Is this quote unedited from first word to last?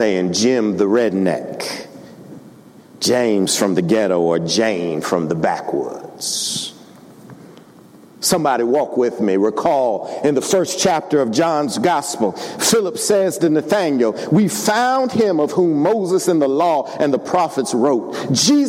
yes; 0 cuts

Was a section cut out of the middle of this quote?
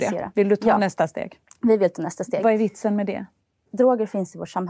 no; 0 cuts

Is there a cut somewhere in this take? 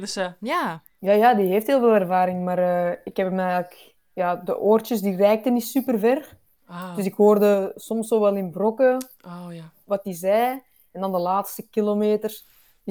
no; 0 cuts

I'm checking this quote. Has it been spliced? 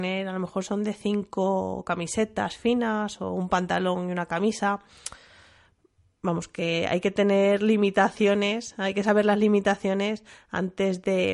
no; 0 cuts

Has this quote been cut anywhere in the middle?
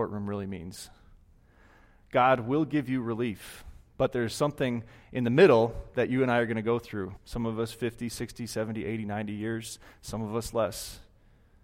yes; 1 cut; at 7.2 s

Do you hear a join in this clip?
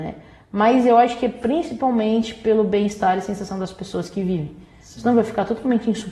no; 0 cuts

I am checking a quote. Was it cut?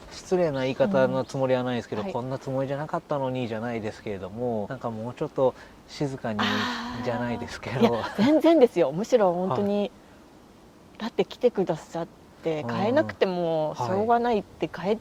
yes; 1 cut; at 4.7 s

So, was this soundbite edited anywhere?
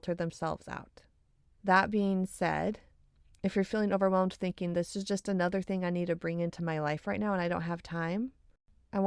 yes; 1 cut; at 1.5 s

